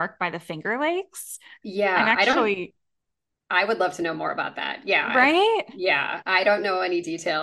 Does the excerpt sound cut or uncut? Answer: uncut